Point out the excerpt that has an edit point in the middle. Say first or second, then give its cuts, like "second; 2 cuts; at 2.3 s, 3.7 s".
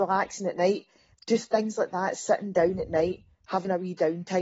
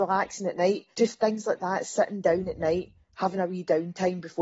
second; 1 cut; at 0.9 s